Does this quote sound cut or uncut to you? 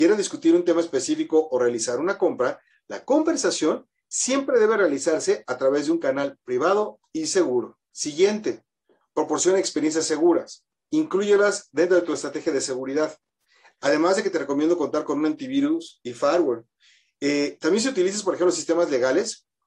cut